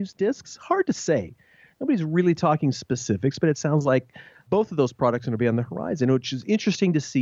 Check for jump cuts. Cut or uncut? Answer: uncut